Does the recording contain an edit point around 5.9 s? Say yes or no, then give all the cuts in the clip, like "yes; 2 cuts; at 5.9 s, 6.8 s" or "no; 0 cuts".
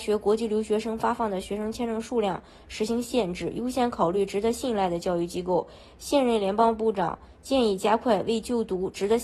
no; 0 cuts